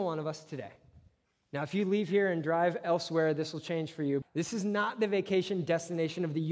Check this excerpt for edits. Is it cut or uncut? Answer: cut